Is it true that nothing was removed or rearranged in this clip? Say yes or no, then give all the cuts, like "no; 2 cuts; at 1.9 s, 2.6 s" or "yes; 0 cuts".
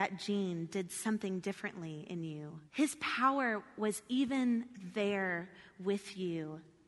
no; 1 cut; at 2.7 s